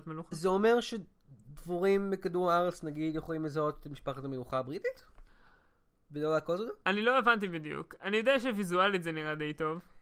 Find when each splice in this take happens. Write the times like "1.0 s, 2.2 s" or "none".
6.8 s

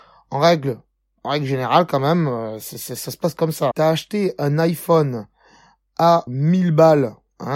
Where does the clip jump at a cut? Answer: 3.7 s, 6.3 s

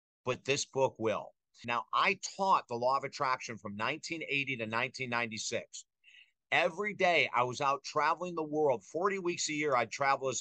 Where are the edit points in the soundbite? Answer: 1.6 s

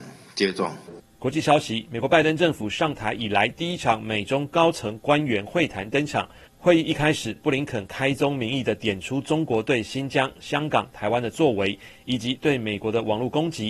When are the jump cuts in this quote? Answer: none

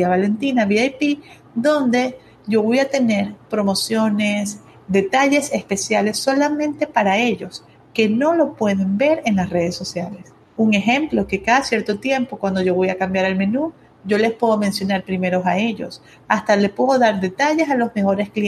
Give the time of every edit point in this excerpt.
none

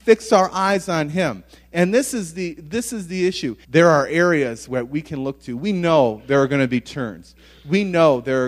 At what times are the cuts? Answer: 3.6 s

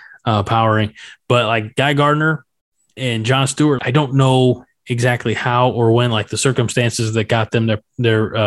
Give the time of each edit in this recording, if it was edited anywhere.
3.8 s

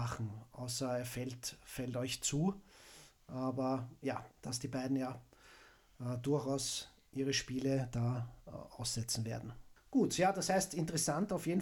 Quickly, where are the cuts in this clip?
4.3 s, 9.8 s

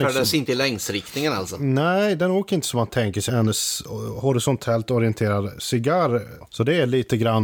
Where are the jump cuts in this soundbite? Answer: 3.3 s, 6.4 s

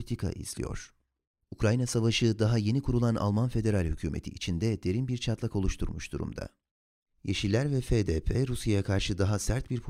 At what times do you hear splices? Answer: 1.3 s

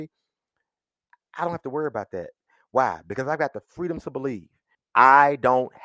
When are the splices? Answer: 4.7 s

